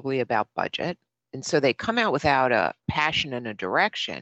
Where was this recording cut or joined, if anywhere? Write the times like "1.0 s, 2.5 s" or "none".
1.2 s